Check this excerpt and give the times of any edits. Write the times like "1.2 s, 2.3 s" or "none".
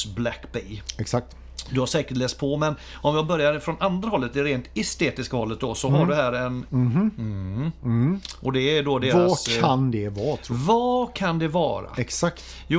6.7 s

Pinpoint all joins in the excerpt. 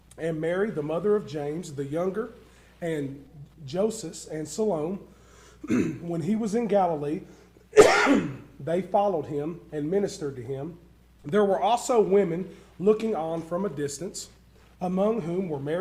11.2 s

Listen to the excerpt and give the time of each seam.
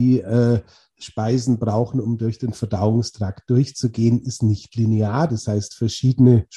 none

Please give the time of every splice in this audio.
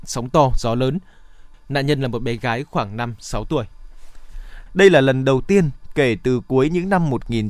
1.5 s, 4.7 s

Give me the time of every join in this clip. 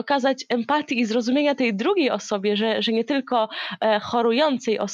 none

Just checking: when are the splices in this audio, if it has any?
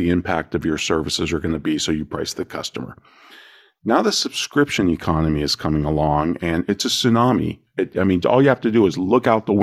none

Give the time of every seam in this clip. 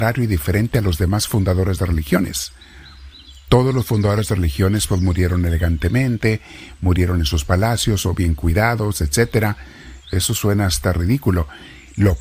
10.0 s

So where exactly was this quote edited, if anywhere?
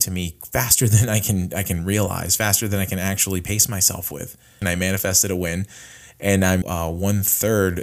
4.6 s, 6.6 s

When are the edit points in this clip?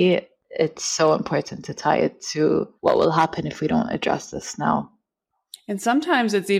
2.8 s

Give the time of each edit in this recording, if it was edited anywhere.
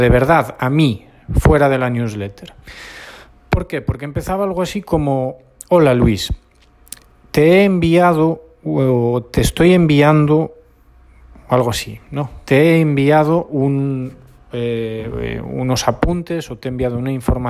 none

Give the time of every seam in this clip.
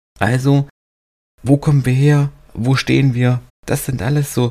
3.5 s

